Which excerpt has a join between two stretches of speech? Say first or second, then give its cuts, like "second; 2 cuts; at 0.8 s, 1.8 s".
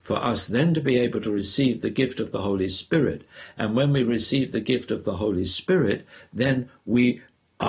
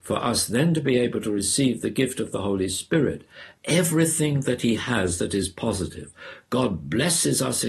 second; 1 cut; at 3.5 s